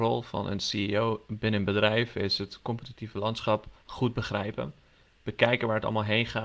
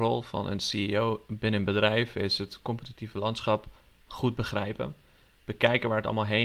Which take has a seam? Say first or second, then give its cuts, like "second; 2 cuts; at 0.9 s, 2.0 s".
first; 1 cut; at 3.8 s